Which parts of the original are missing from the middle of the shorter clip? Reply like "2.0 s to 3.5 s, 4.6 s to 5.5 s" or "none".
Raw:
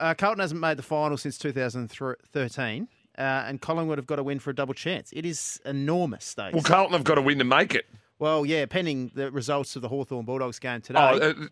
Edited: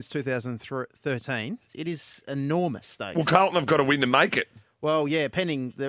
3.0 s to 5.0 s